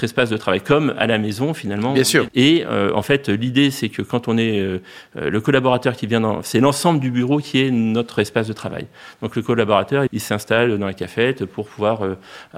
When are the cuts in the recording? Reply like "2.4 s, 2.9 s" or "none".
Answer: 2.3 s, 10.1 s

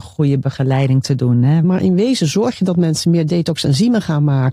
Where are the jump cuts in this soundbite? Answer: 1.6 s

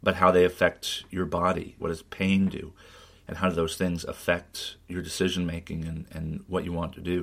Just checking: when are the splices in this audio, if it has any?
1.8 s

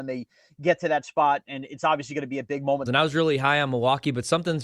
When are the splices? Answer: 2.9 s

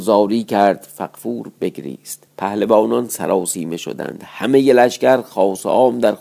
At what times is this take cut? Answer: 2.3 s

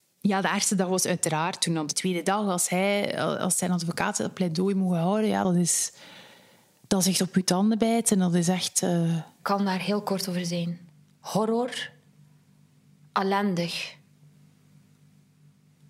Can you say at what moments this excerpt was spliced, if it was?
none

